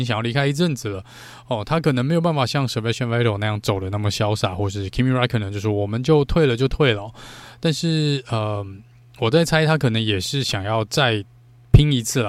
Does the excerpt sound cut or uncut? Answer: uncut